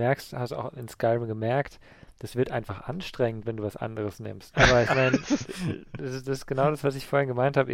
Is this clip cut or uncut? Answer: cut